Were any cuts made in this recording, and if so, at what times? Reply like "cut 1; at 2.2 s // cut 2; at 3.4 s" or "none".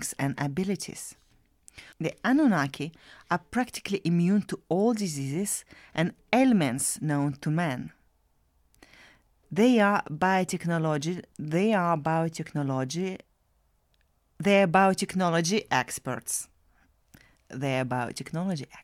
cut 1; at 1.9 s // cut 2; at 11.3 s